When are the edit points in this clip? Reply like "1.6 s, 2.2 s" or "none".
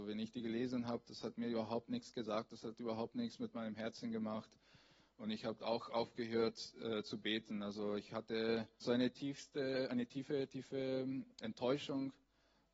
8.8 s, 11.4 s